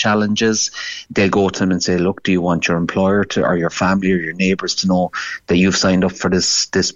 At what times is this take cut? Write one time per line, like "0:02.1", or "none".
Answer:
0:01.1